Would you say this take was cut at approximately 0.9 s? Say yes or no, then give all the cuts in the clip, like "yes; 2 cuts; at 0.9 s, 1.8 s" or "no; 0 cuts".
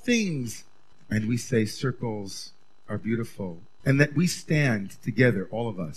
yes; 2 cuts; at 0.9 s, 3.8 s